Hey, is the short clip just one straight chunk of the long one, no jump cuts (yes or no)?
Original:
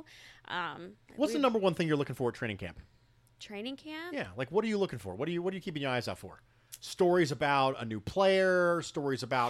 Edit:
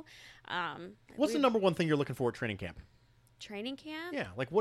yes